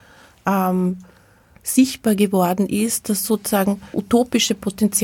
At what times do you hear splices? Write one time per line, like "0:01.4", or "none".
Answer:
0:03.9